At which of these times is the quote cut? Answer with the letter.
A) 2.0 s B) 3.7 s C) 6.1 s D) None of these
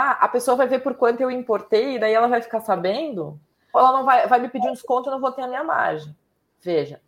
B